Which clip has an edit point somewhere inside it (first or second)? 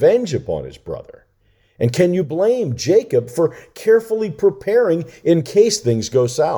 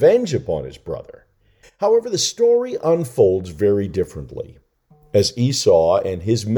second